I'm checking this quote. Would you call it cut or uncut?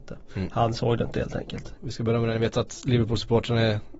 cut